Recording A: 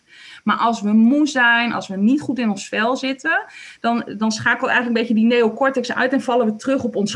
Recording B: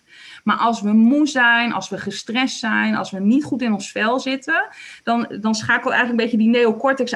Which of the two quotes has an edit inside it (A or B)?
A